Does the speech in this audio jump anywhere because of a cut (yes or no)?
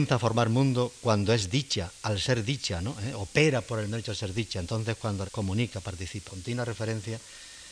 yes